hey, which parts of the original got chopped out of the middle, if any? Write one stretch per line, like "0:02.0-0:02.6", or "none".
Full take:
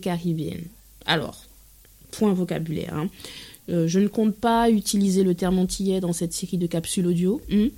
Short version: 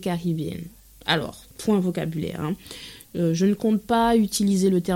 0:01.5-0:02.0